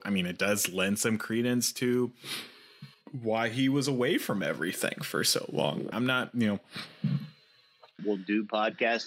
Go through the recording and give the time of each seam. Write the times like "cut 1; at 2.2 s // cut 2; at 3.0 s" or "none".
cut 1; at 5.9 s // cut 2; at 8.0 s